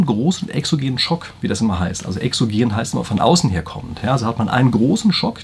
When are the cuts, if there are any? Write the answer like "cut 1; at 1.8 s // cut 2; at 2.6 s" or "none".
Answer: none